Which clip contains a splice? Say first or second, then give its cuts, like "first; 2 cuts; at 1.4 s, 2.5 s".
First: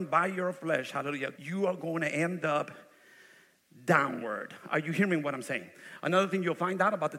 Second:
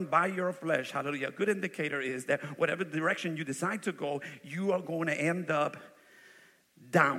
first; 1 cut; at 1.3 s